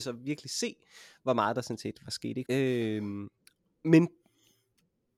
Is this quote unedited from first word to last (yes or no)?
no